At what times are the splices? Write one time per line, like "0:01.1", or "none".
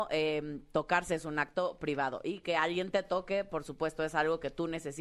none